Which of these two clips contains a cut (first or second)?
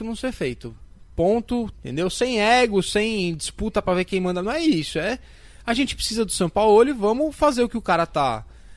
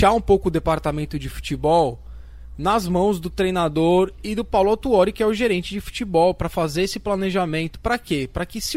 first